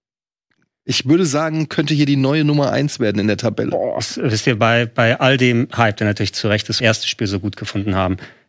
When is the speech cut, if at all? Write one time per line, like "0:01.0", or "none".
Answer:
0:06.8